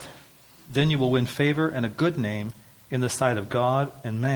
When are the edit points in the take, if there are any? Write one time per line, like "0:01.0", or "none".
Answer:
none